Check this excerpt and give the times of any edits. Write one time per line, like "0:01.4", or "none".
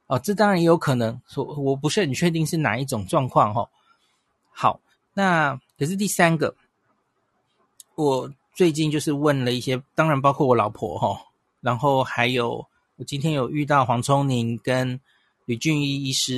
0:05.7